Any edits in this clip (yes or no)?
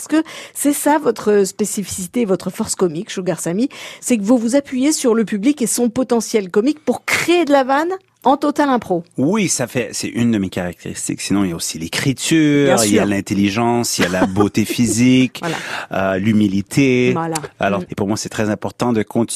yes